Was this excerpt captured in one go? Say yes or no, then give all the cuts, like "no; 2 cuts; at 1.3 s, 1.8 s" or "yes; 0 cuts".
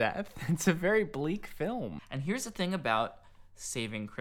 no; 1 cut; at 2.0 s